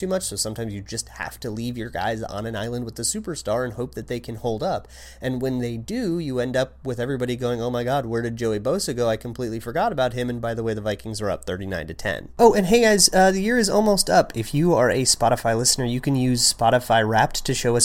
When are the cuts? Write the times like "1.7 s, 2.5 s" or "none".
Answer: none